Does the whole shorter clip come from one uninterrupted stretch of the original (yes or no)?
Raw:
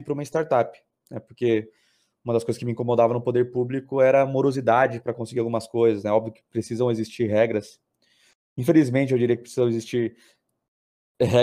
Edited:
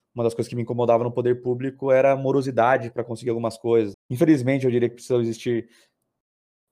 no